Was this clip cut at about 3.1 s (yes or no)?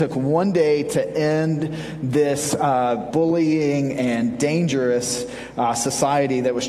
yes